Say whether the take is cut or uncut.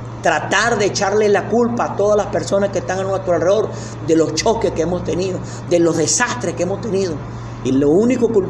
cut